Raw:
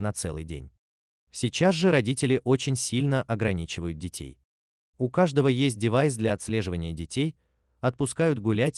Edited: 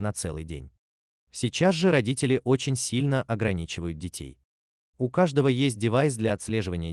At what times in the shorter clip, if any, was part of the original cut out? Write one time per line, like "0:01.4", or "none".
none